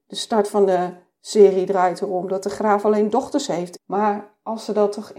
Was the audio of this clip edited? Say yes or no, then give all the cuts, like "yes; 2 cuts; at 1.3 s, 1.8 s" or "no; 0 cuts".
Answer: yes; 1 cut; at 3.8 s